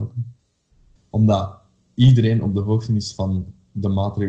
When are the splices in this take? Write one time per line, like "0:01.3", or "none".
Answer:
0:01.0